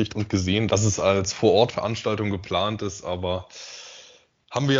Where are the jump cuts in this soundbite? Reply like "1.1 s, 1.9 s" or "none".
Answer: none